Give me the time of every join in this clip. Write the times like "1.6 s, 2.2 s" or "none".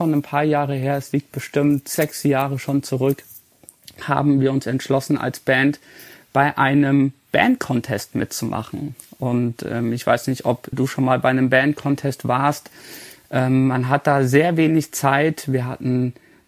10.7 s

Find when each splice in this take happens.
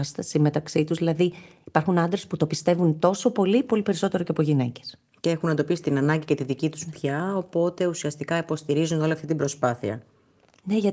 none

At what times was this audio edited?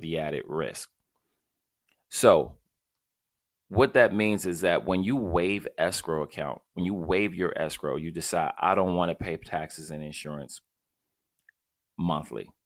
none

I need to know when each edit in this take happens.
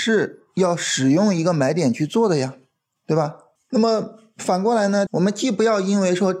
3.6 s, 5.1 s

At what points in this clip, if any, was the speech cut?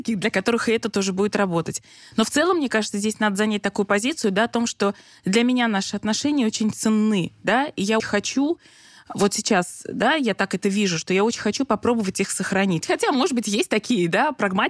8.0 s, 12.8 s

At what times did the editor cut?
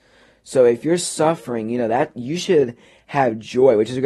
none

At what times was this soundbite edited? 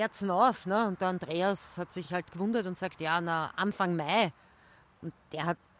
none

